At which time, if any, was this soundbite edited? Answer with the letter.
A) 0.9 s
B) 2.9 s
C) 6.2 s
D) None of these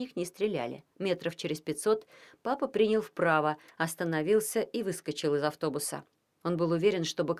A